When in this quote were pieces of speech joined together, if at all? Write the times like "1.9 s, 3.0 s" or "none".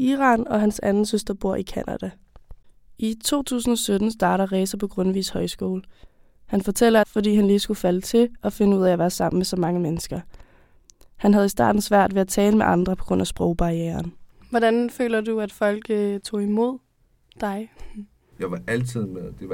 7.0 s